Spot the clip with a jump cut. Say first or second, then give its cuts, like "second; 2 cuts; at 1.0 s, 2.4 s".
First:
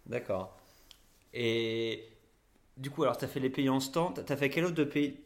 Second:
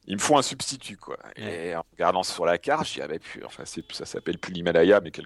second; 1 cut; at 3.5 s